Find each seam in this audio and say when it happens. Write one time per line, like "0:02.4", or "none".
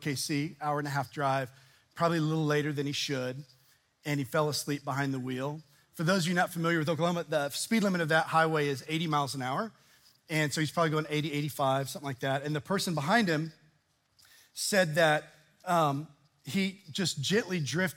none